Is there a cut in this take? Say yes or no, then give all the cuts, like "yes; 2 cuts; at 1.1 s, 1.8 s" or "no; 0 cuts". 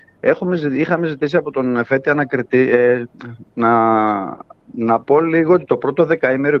no; 0 cuts